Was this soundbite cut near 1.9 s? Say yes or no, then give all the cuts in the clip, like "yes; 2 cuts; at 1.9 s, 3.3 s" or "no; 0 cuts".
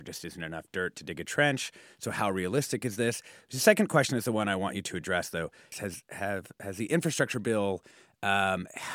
no; 1 cut; at 5.7 s